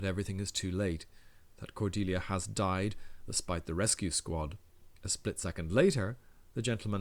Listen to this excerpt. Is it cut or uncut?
cut